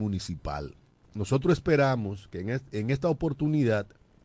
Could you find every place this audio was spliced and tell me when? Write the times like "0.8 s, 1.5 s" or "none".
1.0 s